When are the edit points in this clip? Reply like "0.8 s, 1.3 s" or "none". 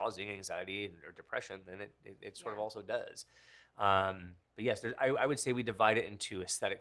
none